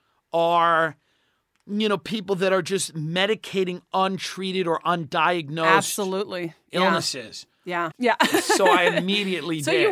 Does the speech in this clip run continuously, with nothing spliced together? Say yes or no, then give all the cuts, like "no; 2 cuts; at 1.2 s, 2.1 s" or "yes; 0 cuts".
no; 1 cut; at 7.9 s